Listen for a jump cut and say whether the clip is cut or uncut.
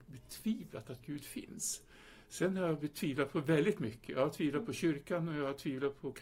uncut